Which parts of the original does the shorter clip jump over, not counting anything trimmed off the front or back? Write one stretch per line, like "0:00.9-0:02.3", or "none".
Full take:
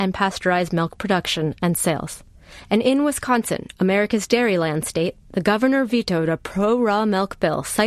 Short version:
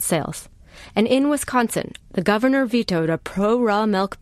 0:03.8-0:05.2